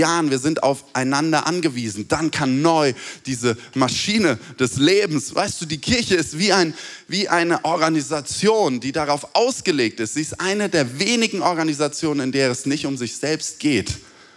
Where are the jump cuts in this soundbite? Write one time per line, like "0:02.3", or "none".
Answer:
none